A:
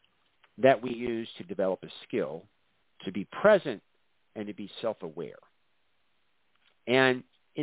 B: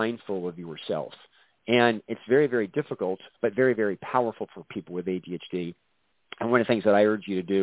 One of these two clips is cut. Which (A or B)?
B